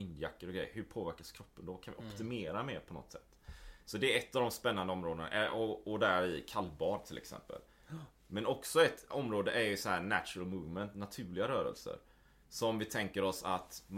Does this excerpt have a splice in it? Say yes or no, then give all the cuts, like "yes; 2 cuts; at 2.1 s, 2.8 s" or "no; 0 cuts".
no; 0 cuts